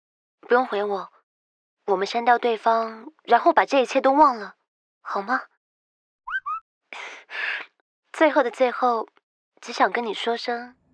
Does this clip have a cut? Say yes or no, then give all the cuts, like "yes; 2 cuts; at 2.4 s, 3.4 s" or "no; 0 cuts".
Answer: no; 0 cuts